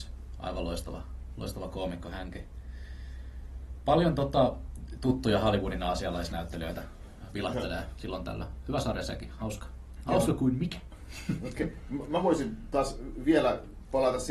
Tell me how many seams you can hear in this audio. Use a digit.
0